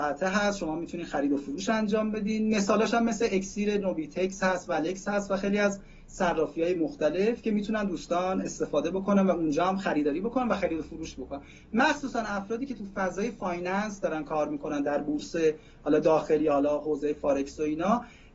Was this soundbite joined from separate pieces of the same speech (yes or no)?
no